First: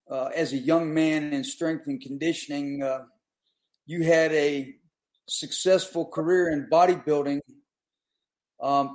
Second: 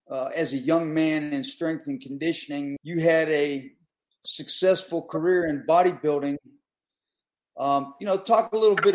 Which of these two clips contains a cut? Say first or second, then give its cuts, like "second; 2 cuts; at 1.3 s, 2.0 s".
second; 1 cut; at 2.8 s